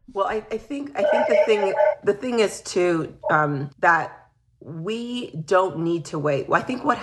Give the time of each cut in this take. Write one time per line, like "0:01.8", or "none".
0:03.7